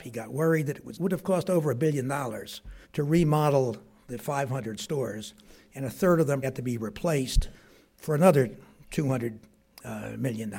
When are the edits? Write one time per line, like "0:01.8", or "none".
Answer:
0:00.9
0:02.8
0:06.4

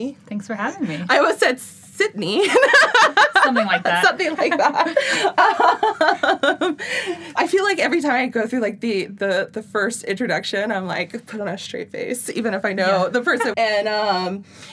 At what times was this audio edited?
0:07.4
0:13.5

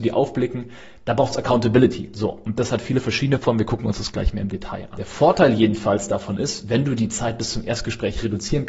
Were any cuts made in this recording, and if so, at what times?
none

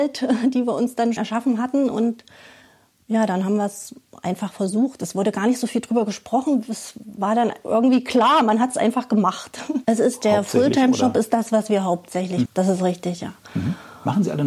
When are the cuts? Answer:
0:01.2
0:09.8
0:12.4

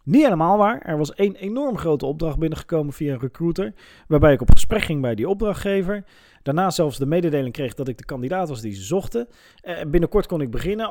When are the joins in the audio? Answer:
none

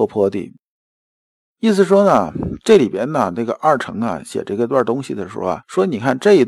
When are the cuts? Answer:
none

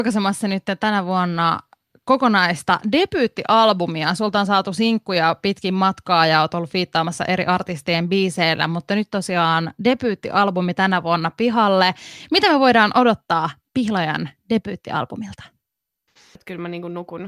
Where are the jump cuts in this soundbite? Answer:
0:16.4

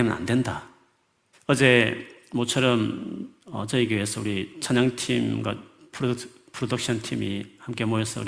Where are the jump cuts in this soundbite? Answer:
0:01.3
0:03.4

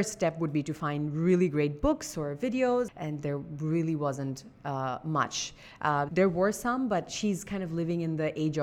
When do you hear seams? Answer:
0:02.9
0:06.1

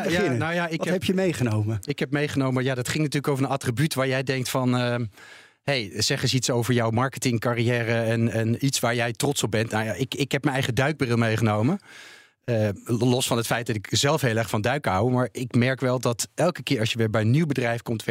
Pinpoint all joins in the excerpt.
none

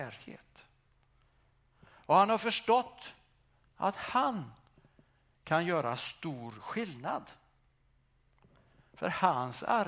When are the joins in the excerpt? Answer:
none

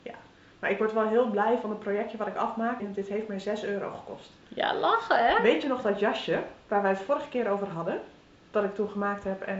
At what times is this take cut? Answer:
0:02.8

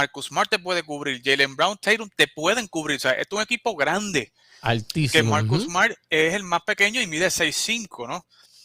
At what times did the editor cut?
none

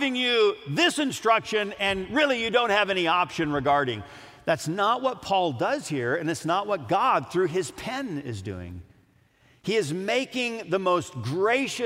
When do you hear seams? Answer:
none

